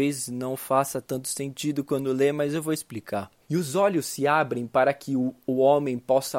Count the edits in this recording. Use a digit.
1